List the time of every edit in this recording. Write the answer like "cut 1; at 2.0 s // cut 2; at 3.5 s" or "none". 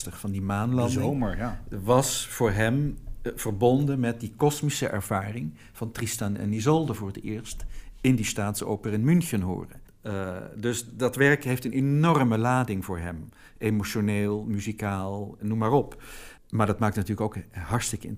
cut 1; at 15.4 s